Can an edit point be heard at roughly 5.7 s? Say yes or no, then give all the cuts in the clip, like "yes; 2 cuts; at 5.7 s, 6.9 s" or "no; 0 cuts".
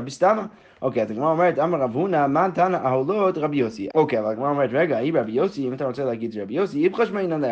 no; 1 cut; at 3.9 s